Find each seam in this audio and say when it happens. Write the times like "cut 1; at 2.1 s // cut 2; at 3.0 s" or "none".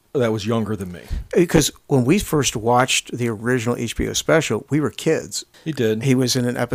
cut 1; at 5.5 s